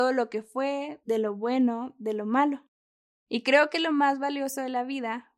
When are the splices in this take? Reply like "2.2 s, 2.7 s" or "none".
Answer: 1.0 s, 3.1 s